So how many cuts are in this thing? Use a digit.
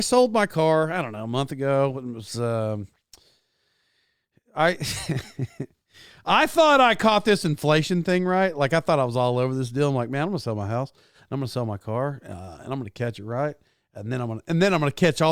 0